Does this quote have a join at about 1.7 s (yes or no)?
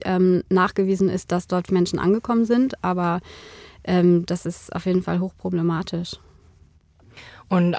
yes